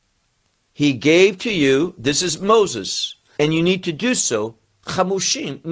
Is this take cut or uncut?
cut